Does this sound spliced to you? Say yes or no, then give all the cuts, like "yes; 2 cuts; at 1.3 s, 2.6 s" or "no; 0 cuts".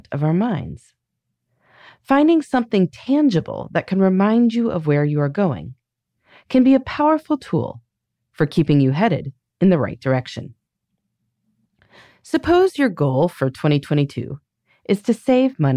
no; 0 cuts